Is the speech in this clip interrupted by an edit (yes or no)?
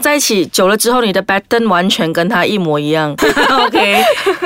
yes